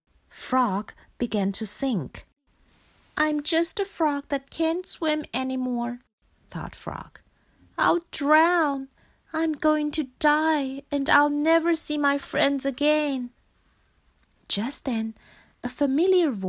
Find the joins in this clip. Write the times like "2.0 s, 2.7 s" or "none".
none